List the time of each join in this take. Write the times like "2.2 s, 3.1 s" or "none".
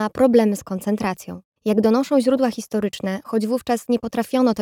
1.6 s